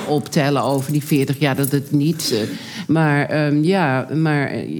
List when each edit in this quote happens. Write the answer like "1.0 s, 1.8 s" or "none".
2.8 s